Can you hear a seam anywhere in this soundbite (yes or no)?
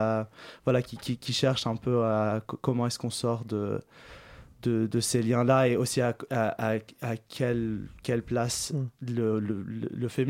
no